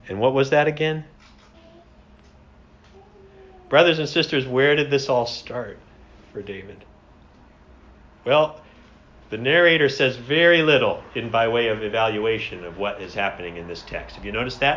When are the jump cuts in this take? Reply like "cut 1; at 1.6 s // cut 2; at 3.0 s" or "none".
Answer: cut 1; at 1.5 s

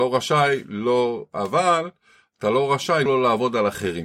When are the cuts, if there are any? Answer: cut 1; at 3.1 s

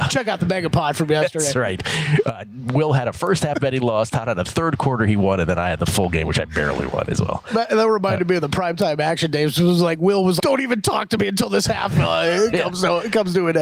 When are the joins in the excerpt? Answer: cut 1; at 10.4 s

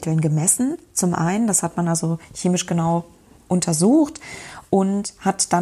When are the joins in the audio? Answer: none

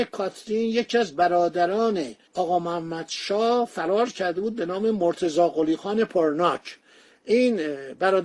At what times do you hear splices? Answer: cut 1; at 2.3 s

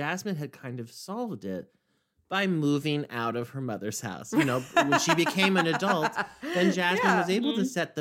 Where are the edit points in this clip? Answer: none

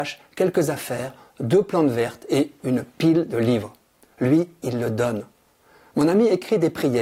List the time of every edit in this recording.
cut 1; at 4.1 s

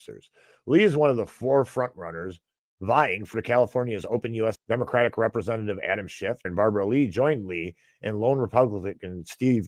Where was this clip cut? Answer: cut 1; at 4.5 s // cut 2; at 6.4 s

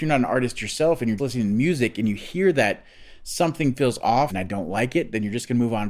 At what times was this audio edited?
cut 1; at 1.2 s // cut 2; at 4.3 s

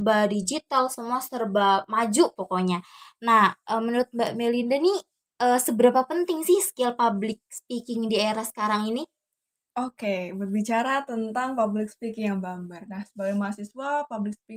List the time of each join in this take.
cut 1; at 12.9 s

